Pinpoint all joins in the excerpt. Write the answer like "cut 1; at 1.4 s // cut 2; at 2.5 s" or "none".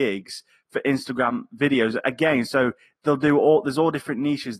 none